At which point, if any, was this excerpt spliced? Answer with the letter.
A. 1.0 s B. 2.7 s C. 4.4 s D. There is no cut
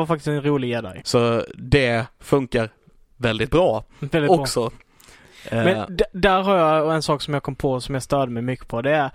A